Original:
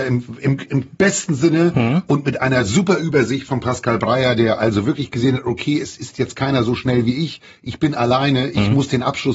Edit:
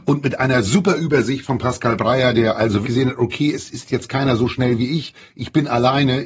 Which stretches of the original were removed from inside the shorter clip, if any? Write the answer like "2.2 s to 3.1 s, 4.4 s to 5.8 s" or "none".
4.9 s to 5.1 s